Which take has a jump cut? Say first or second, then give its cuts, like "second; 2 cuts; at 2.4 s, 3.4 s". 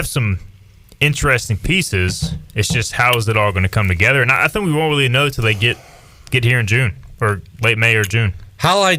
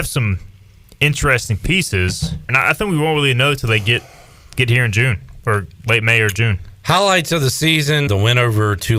second; 2 cuts; at 2.5 s, 8.1 s